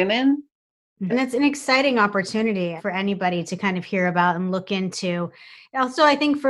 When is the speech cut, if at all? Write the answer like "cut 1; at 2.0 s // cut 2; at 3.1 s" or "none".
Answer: cut 1; at 1.1 s // cut 2; at 2.8 s